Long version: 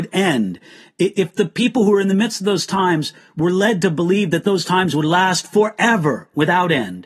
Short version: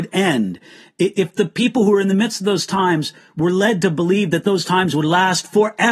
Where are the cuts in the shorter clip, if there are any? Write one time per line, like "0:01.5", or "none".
none